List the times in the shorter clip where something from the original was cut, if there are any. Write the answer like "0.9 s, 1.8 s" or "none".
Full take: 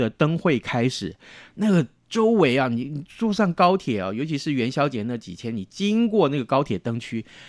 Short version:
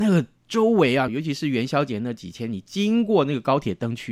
1.1 s